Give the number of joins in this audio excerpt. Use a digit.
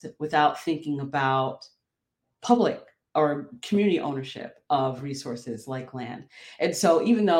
0